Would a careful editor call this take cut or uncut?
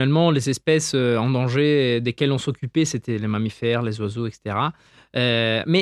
uncut